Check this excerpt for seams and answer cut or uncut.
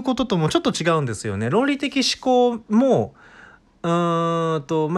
uncut